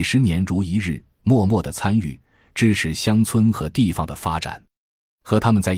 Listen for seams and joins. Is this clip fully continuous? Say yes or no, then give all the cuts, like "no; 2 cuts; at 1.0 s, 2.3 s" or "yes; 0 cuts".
yes; 0 cuts